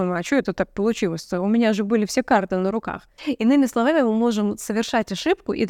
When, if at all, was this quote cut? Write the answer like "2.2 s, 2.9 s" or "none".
3.2 s